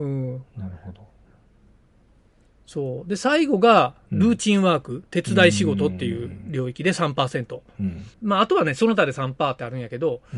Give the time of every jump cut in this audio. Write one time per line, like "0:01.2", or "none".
0:08.1